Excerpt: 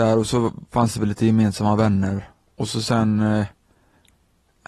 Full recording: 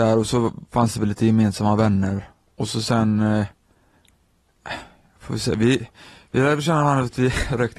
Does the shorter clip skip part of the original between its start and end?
no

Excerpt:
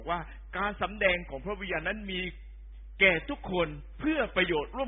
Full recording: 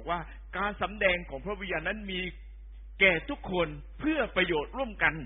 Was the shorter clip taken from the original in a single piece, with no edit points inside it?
yes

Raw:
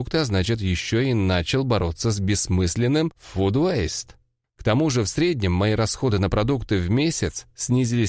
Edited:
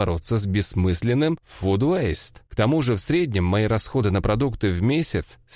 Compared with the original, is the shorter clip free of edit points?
no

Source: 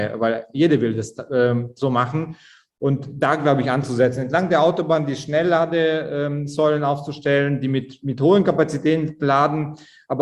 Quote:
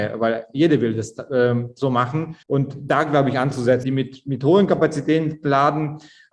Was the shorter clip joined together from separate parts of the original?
yes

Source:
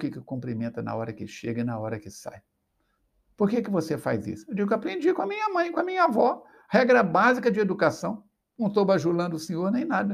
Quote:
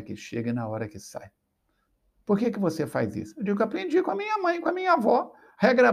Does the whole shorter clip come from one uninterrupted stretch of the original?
yes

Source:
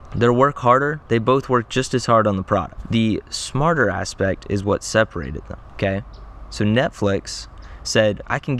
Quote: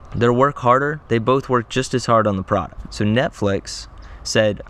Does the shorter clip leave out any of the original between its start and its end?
yes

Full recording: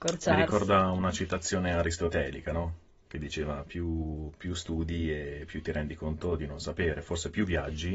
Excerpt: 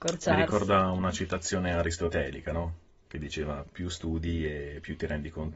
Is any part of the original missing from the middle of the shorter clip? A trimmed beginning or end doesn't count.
yes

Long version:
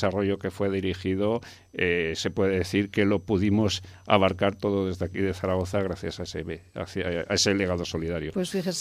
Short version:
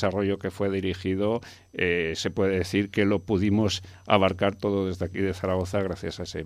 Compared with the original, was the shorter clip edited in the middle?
no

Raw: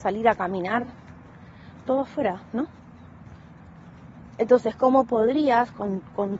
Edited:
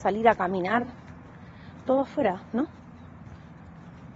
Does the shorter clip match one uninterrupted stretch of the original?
yes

